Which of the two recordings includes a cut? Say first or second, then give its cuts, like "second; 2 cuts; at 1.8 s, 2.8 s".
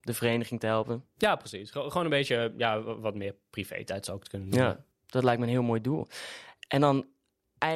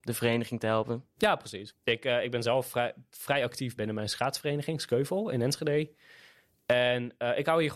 second; 2 cuts; at 1.7 s, 3.8 s